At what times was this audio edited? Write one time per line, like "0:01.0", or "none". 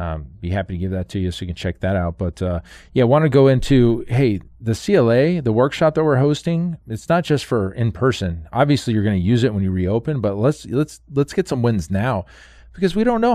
none